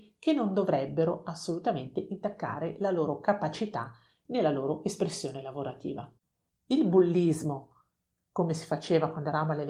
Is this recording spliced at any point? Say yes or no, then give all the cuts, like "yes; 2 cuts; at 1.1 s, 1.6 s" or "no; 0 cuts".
no; 0 cuts